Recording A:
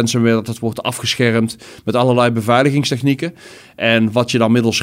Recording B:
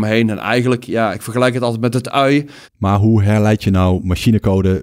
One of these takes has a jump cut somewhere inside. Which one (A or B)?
B